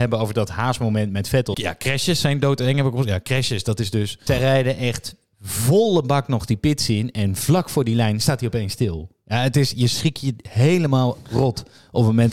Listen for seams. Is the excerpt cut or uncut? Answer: cut